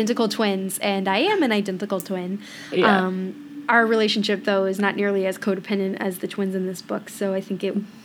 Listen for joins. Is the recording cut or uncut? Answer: uncut